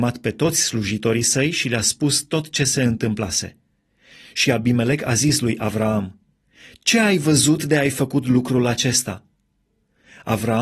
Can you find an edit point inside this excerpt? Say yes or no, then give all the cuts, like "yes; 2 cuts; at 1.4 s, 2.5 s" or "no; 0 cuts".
yes; 1 cut; at 4.3 s